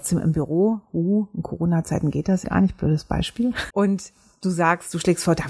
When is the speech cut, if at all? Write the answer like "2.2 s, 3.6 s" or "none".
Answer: 2.4 s, 3.7 s